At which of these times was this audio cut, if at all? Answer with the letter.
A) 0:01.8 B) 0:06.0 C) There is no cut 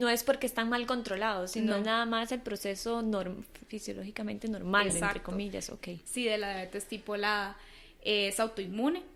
C